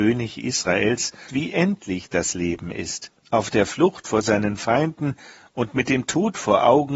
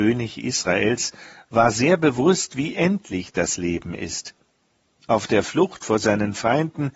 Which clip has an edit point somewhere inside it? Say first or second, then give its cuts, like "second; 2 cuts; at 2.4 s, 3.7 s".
first; 2 cuts; at 1.3 s, 3.2 s